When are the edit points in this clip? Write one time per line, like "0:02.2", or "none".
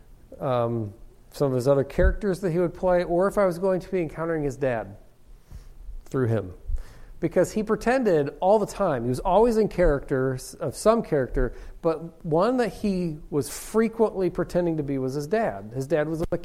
none

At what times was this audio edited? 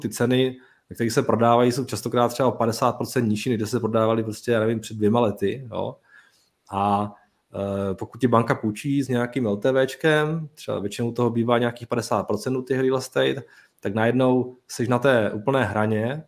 none

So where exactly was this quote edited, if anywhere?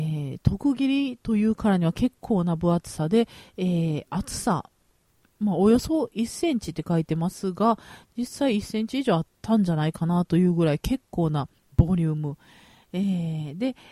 none

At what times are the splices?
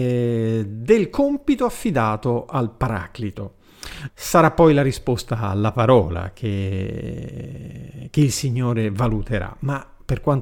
0:04.1

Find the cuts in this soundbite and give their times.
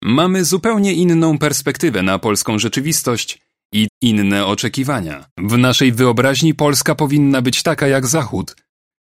0:03.9
0:05.3

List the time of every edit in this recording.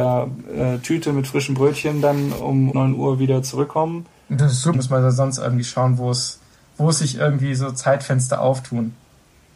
0:02.7
0:04.7

